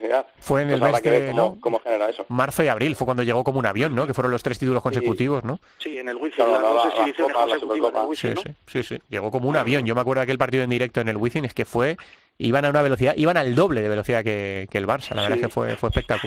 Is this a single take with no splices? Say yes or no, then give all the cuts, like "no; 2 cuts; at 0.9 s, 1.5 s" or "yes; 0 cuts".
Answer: yes; 0 cuts